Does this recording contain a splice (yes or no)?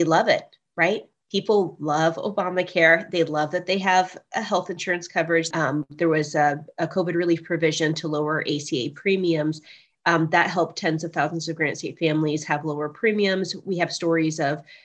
yes